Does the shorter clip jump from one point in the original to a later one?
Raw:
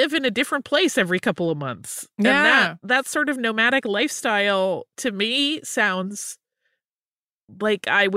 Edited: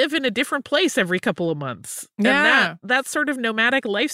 no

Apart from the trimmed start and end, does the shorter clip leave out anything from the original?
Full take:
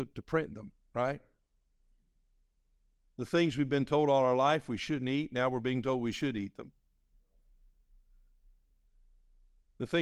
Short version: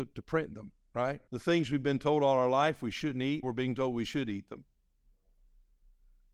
yes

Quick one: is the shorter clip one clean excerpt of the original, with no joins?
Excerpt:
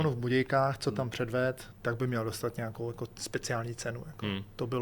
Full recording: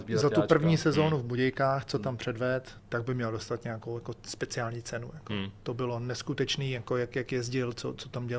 yes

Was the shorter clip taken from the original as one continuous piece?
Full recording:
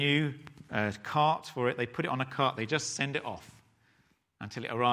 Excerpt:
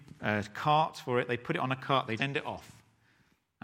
no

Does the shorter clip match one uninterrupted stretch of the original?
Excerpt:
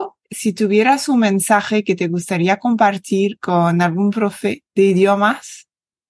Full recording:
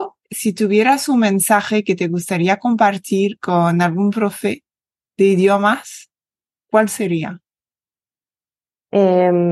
no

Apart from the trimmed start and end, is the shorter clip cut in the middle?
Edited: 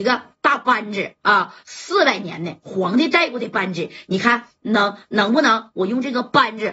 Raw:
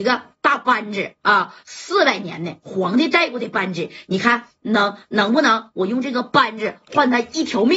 no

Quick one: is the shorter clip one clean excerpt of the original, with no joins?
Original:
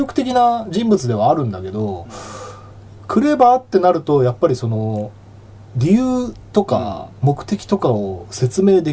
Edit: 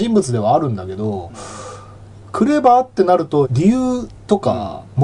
no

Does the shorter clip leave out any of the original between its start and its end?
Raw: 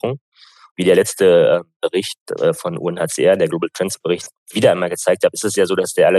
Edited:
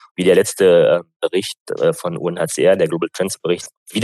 no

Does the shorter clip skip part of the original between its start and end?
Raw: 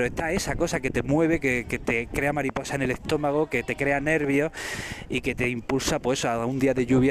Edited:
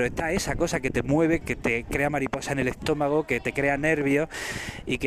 yes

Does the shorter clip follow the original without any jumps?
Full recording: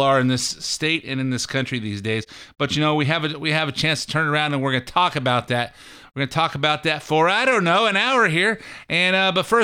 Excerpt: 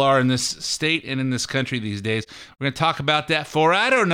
no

